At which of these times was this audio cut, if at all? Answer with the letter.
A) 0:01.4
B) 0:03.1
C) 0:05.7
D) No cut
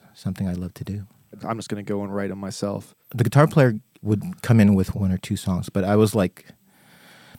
A